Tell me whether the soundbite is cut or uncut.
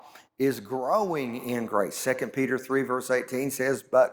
uncut